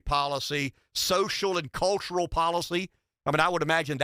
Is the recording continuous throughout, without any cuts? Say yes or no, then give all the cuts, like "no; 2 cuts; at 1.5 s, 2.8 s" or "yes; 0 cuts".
yes; 0 cuts